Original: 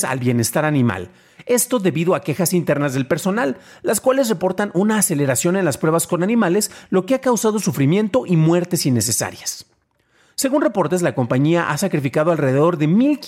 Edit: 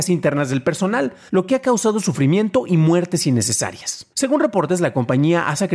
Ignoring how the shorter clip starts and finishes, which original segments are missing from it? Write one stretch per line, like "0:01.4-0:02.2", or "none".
0:03.7-0:06.9
0:09.7-0:10.3